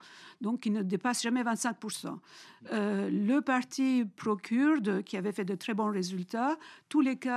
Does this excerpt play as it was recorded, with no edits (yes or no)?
yes